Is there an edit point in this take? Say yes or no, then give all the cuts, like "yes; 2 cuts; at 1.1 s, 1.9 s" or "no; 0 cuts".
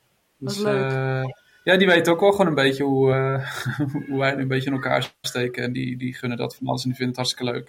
no; 0 cuts